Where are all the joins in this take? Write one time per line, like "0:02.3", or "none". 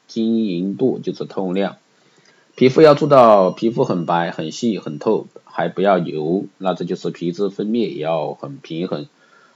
none

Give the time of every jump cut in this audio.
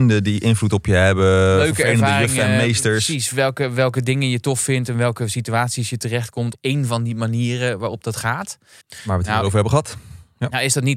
0:06.5
0:08.8

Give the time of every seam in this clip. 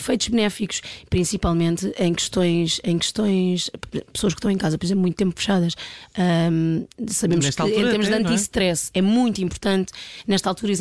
none

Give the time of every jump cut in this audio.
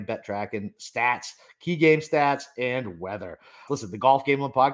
0:03.7

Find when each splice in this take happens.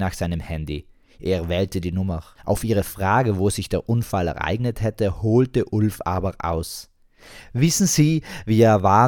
0:02.3

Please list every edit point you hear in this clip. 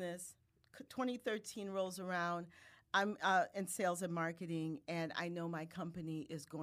none

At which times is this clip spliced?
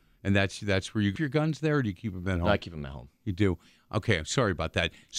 0:01.2

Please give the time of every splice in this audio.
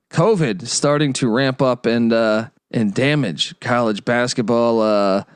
0:02.6

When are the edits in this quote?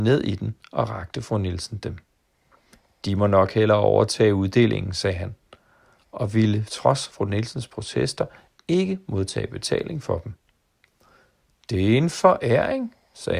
none

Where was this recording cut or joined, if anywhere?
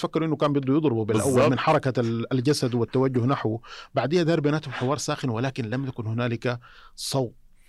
none

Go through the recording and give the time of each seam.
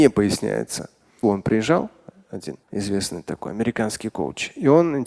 0:01.2
0:02.6

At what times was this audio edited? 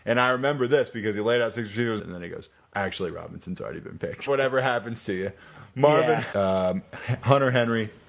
0:02.0
0:04.3
0:06.3

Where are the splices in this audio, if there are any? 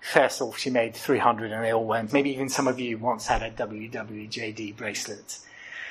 0:02.1

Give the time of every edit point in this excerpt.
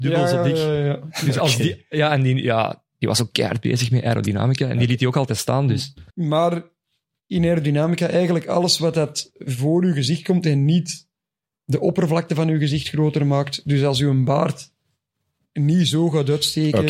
0:06.1

